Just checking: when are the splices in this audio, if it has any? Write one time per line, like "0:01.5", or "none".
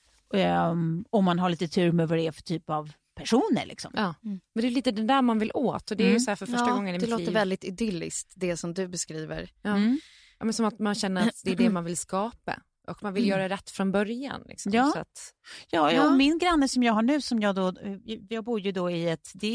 none